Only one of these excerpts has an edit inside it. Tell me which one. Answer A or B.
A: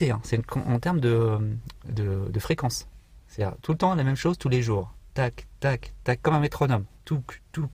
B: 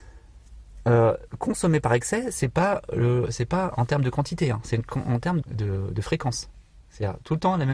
B